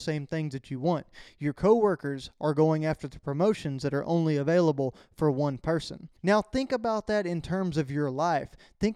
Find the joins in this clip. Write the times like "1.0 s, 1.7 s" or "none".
6.2 s